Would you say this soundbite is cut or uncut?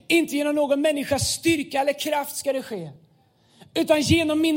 uncut